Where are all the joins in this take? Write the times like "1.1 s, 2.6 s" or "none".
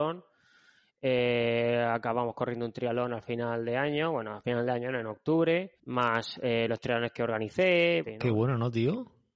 5.8 s, 8.0 s